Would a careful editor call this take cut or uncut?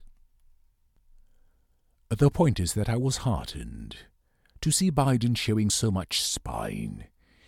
uncut